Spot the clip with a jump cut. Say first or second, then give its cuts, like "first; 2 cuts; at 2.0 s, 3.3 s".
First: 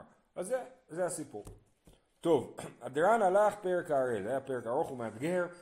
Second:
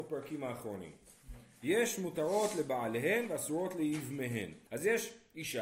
second; 1 cut; at 4.7 s